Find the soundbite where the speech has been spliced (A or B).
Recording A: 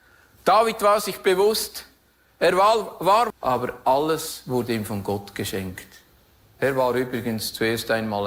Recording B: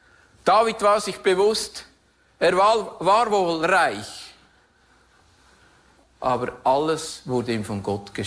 A